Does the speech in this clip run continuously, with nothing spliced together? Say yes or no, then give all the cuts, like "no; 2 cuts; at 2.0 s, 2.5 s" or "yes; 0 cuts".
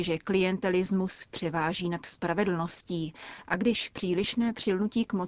yes; 0 cuts